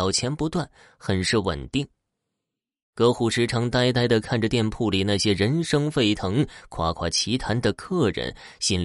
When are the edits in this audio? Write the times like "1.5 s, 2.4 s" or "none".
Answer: none